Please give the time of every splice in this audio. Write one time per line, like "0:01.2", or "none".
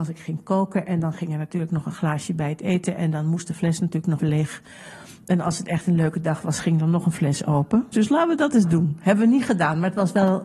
0:04.2
0:07.9